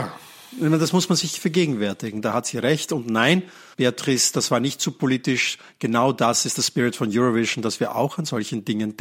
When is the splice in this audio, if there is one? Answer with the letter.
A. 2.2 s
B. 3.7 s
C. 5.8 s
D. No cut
B